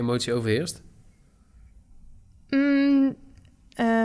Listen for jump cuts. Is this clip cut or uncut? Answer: uncut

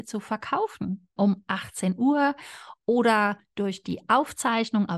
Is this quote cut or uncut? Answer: cut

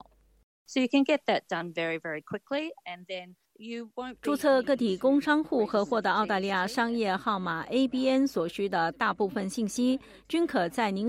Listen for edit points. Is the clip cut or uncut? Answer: uncut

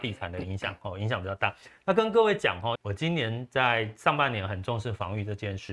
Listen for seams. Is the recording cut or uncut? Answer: cut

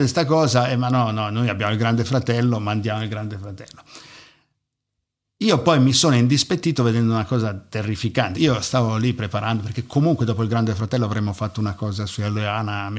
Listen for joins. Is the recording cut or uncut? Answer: cut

